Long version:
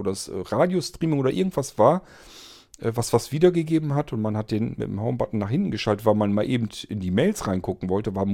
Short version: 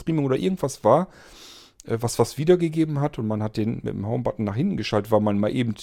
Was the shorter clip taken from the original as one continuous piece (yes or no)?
yes